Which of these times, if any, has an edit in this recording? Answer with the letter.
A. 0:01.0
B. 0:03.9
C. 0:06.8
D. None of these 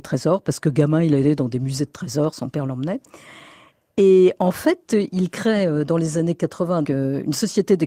C